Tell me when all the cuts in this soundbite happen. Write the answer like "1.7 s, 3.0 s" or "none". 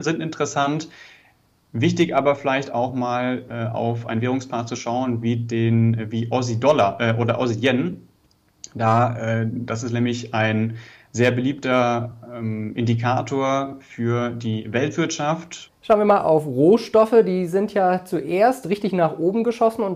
15.7 s